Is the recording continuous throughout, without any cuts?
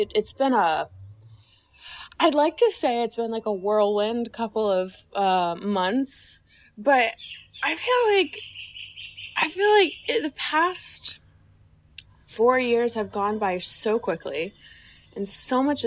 yes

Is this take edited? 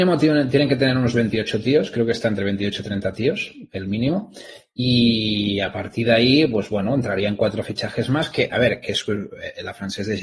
no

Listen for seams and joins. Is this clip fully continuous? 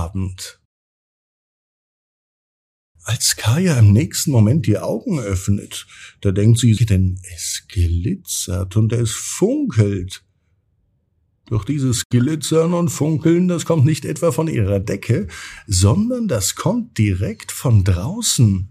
no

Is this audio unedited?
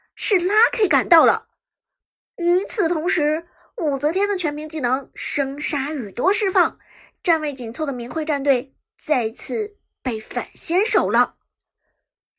yes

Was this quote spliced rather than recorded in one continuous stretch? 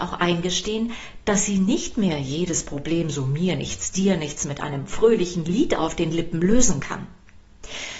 no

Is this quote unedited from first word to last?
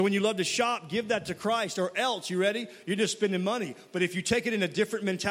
yes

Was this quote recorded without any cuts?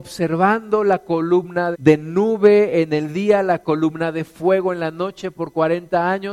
no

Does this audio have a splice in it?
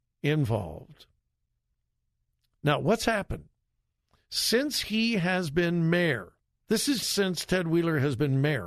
yes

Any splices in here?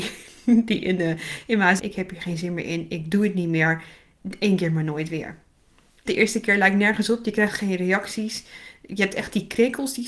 yes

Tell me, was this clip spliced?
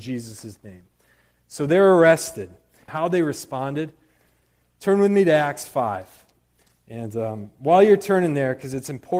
yes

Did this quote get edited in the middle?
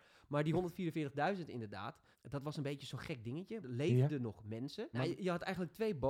yes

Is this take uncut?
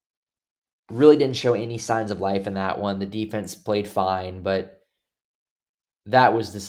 yes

